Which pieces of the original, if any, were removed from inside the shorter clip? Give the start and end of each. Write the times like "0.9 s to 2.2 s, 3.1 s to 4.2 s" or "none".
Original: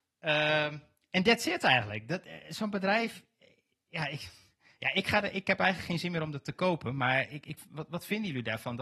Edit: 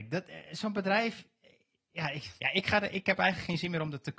4.3 s to 4.8 s

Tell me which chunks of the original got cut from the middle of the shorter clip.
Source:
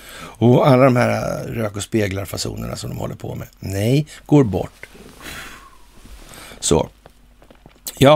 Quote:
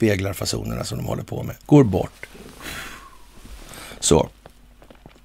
3.5 s to 4.2 s

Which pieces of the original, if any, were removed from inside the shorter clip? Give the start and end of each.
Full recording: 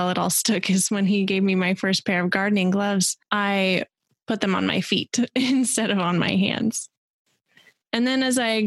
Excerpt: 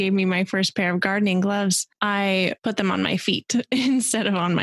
3.9 s to 4.2 s

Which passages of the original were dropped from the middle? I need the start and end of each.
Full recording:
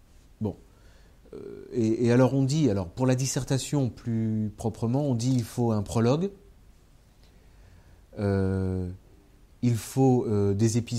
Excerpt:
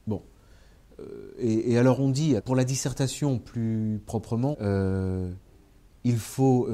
2.7 s to 2.9 s, 5.0 s to 8.1 s

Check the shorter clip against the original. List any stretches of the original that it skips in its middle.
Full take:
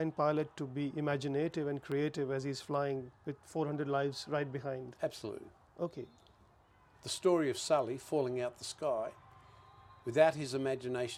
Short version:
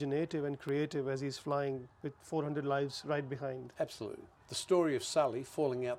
5.6 s to 6.9 s

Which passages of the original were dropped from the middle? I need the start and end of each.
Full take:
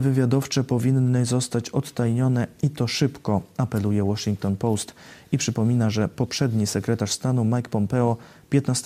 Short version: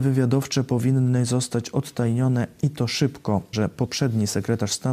3.5 s to 5.9 s

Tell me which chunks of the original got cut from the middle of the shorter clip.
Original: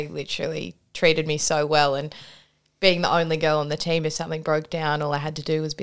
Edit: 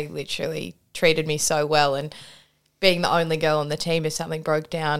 none

